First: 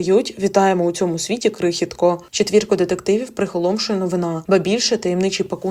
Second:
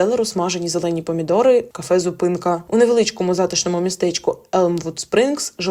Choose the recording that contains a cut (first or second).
first